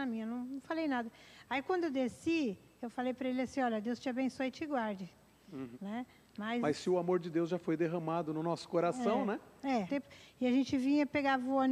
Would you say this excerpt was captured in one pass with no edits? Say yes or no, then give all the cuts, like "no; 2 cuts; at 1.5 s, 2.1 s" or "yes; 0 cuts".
no; 2 cuts; at 5.7 s, 9.9 s